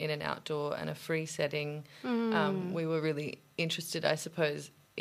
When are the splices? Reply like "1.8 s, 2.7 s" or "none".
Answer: none